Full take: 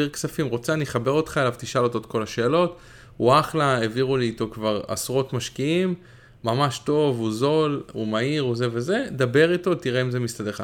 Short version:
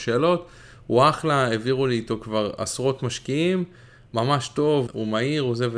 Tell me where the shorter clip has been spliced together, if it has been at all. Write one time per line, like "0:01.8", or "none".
0:04.9

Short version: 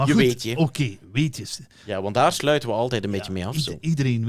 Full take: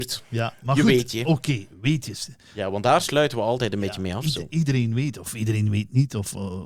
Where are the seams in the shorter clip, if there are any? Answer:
none

